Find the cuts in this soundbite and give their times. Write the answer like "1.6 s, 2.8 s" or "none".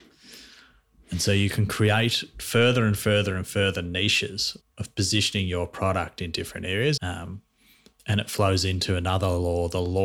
4.6 s, 7.0 s